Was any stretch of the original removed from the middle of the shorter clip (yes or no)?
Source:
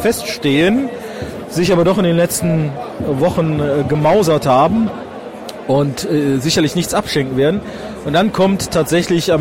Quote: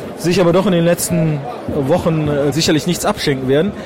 yes